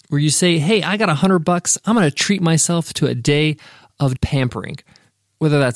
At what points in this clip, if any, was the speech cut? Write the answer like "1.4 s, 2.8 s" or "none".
4.2 s

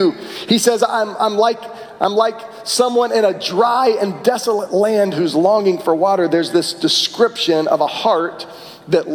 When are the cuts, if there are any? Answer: none

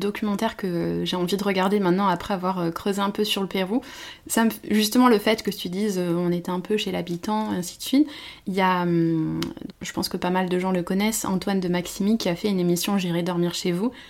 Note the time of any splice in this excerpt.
9.7 s

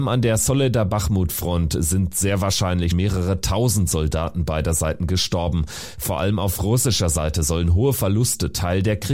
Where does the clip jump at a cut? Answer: 2.9 s

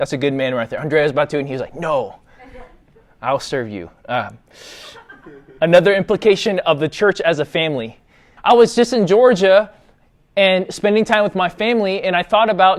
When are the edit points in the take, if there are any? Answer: 8.4 s

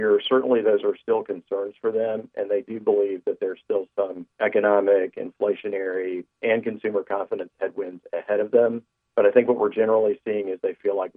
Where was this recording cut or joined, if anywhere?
4.3 s, 6.3 s

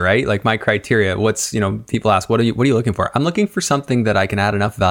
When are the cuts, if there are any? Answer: none

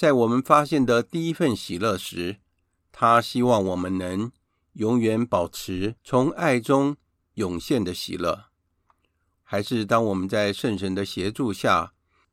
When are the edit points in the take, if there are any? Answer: 6.0 s, 9.3 s

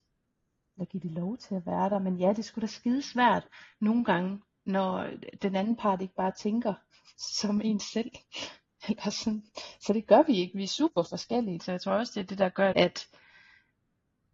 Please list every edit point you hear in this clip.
11.6 s, 12.7 s

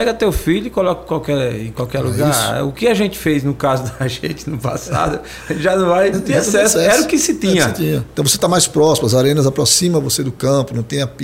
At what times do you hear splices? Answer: 6.1 s, 8.1 s

